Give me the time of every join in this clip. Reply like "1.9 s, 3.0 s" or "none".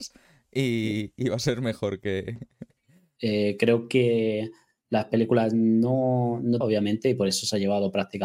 3.2 s, 6.6 s